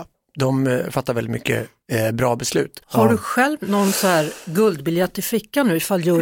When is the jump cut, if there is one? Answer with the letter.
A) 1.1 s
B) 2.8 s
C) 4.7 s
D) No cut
B